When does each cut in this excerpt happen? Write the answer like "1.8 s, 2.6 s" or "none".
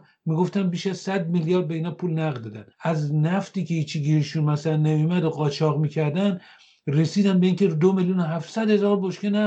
2.7 s